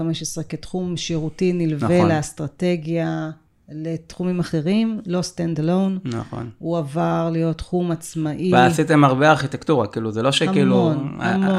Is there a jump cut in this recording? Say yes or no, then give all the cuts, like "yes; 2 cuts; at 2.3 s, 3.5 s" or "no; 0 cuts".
no; 0 cuts